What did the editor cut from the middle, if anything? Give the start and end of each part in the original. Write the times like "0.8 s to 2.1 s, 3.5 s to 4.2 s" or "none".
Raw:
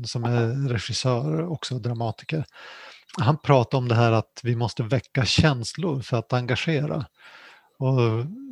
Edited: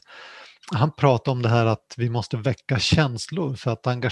none